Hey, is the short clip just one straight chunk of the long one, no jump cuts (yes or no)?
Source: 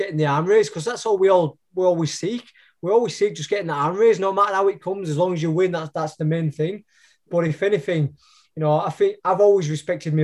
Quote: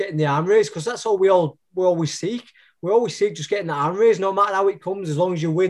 yes